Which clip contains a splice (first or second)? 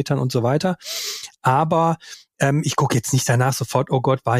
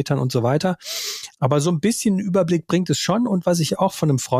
second